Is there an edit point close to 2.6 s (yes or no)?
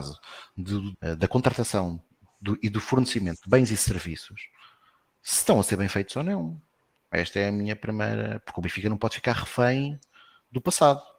no